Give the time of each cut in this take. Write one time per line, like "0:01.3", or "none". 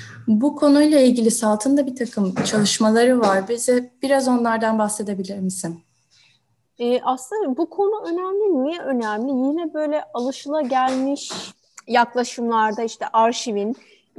0:06.6

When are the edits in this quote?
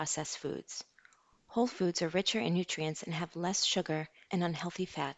0:04.3

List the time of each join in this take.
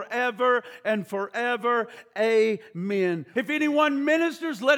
0:03.3

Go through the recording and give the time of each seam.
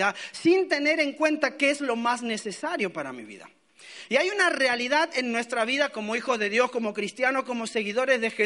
none

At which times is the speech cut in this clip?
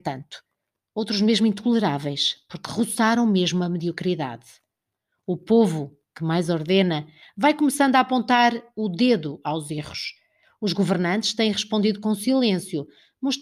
0:07.2

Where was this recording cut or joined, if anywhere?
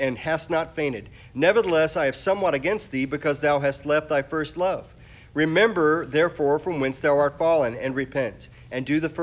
none

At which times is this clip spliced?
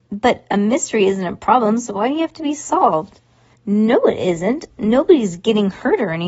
0:03.5

